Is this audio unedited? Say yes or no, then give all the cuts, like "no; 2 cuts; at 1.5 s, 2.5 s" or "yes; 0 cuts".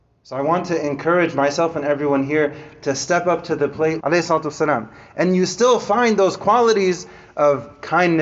no; 1 cut; at 4.0 s